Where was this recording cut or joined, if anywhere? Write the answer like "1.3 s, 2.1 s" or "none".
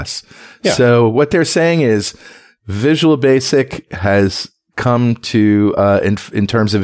none